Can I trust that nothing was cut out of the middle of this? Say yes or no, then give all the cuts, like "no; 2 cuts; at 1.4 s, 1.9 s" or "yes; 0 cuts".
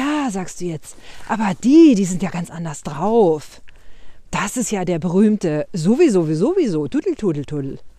yes; 0 cuts